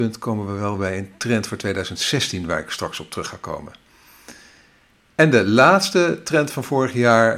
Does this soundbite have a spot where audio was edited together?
no; 0 cuts

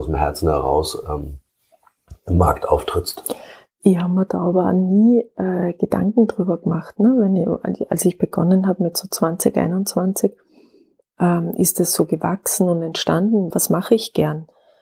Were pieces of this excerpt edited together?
yes; 1 cut; at 13.5 s

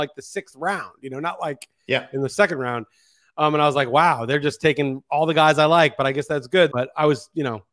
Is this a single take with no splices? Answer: no; 1 cut; at 6.7 s

